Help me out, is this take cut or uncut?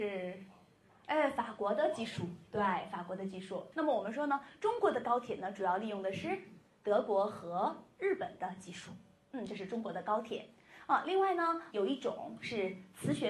cut